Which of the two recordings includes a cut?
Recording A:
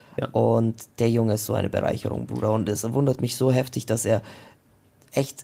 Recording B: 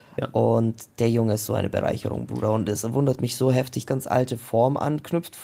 B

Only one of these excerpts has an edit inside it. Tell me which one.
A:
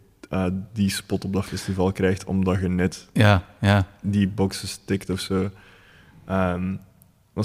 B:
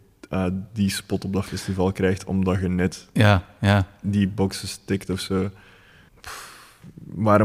B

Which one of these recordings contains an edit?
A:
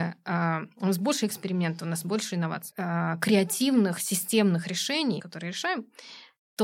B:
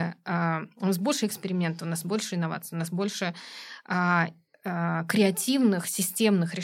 A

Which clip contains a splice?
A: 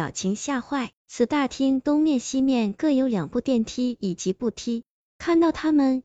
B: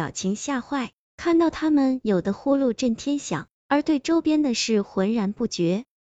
A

